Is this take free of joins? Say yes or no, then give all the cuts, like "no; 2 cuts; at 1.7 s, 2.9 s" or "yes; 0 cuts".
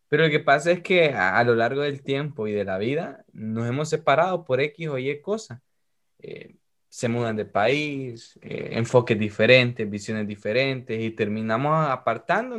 yes; 0 cuts